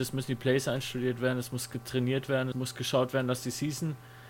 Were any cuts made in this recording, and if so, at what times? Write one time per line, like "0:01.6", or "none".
0:02.5

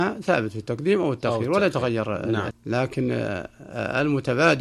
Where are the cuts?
0:02.5

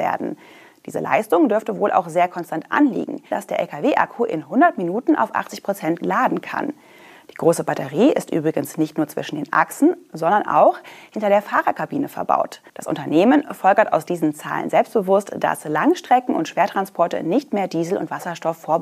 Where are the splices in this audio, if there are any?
0:03.3
0:12.7

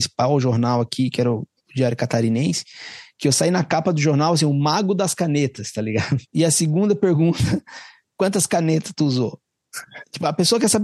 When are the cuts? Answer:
0:06.2

